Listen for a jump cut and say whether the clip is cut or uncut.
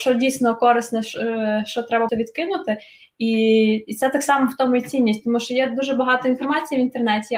cut